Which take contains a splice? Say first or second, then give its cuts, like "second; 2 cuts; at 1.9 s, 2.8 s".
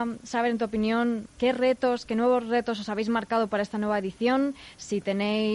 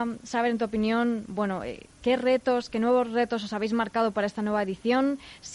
first; 1 cut; at 1.3 s